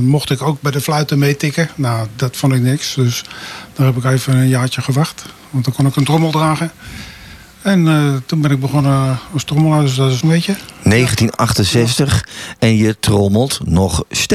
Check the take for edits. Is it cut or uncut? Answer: cut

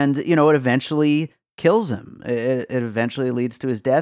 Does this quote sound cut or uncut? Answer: uncut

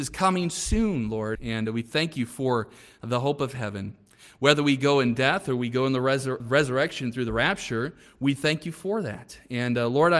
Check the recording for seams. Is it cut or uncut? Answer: cut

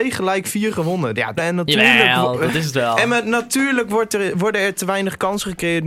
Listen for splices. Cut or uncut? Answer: cut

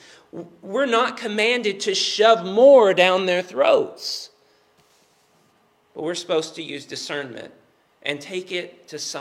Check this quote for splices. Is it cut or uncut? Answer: uncut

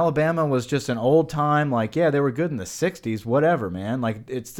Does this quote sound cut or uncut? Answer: uncut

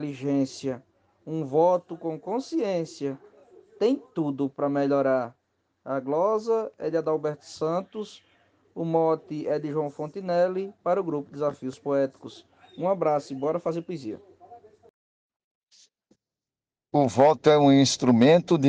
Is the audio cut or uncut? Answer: uncut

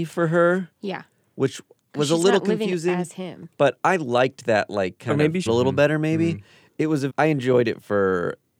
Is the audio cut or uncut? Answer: cut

